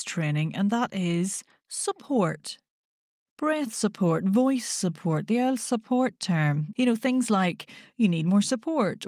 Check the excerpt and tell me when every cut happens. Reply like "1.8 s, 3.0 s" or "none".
6.7 s